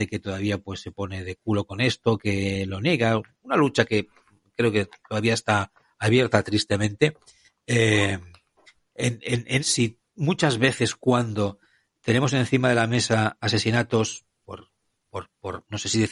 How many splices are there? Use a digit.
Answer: 2